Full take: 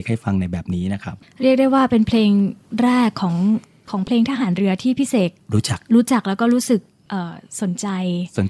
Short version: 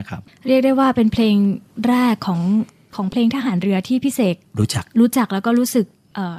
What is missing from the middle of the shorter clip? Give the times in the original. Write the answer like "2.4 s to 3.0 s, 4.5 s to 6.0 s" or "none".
none